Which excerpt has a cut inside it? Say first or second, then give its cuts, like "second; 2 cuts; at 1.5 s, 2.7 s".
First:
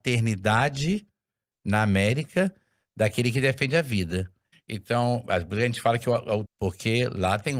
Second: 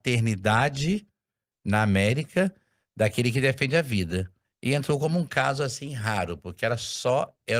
first; 2 cuts; at 4.5 s, 6.5 s